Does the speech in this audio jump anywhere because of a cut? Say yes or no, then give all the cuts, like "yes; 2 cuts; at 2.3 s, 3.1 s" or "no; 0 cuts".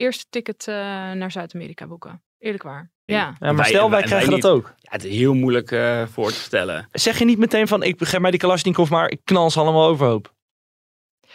yes; 1 cut; at 3.1 s